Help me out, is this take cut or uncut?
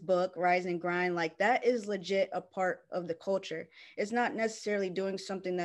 uncut